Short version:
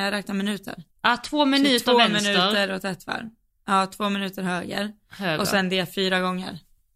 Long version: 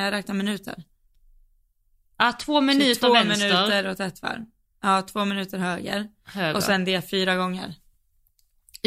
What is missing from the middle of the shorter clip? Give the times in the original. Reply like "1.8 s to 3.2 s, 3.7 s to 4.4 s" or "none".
0.9 s to 2.1 s